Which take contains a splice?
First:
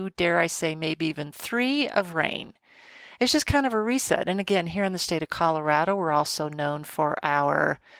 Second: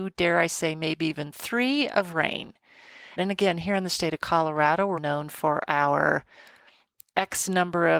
second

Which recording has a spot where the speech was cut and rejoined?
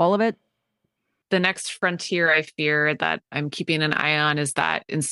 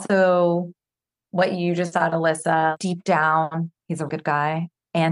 second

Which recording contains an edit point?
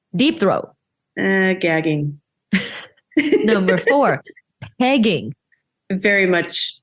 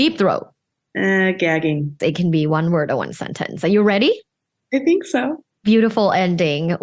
second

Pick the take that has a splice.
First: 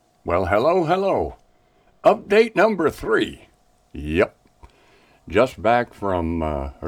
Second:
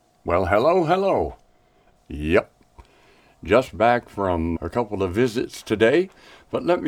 second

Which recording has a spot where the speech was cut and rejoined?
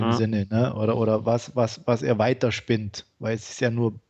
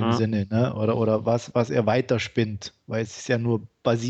second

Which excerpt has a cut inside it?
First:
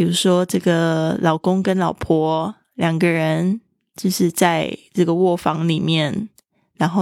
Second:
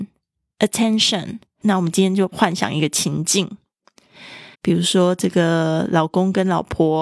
second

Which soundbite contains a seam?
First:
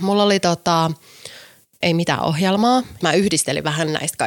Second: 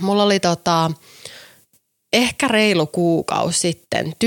first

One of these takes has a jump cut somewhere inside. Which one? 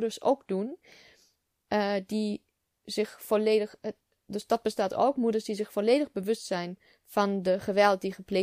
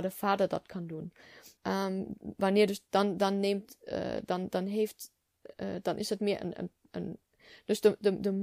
second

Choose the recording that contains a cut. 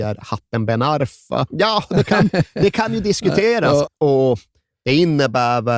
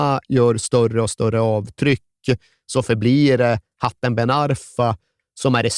first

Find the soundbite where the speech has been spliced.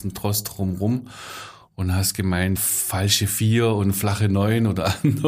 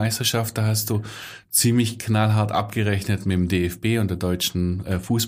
first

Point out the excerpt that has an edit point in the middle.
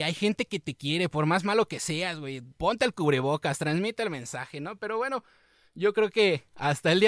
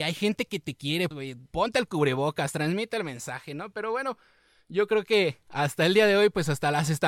second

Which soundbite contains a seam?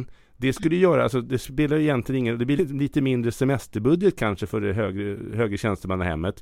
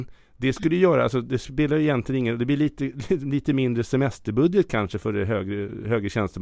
first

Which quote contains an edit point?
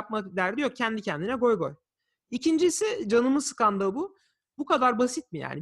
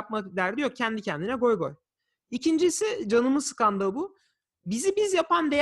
first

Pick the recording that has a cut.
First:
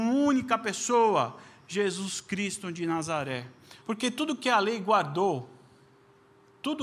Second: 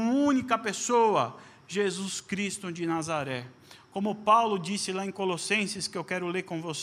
first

